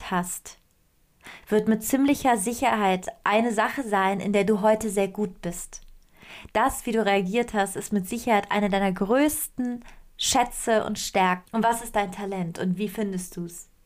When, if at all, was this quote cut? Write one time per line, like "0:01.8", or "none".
0:06.5
0:11.4